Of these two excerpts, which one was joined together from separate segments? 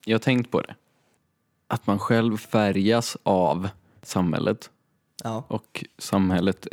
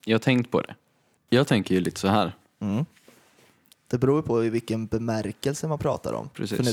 second; 2 cuts; at 1.3 s, 3.7 s

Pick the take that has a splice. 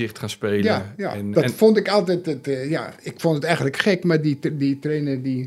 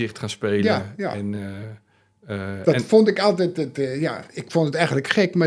first; 1 cut; at 1.3 s

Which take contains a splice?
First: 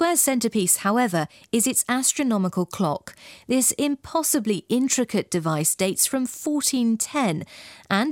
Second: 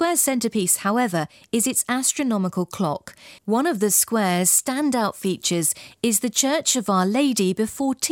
second; 1 cut; at 3.4 s

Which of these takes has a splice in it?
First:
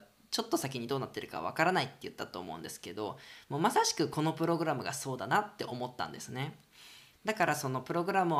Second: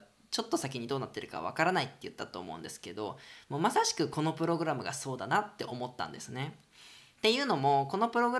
first; 1 cut; at 7.1 s

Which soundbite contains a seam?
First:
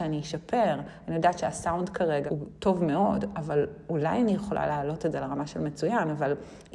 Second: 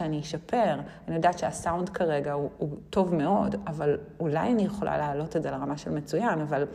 first; 1 cut; at 2.3 s

